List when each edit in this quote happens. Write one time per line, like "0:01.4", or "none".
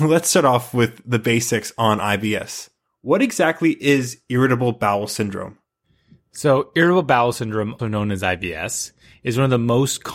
0:07.8